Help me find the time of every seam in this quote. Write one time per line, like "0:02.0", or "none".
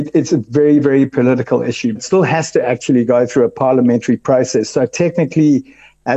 0:02.0